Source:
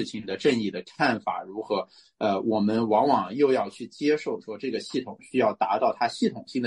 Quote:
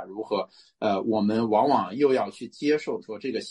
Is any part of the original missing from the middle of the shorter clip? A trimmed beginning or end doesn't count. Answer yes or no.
no